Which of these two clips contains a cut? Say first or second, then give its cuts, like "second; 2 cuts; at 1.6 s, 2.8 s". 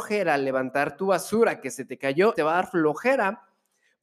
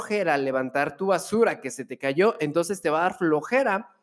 first; 1 cut; at 2.3 s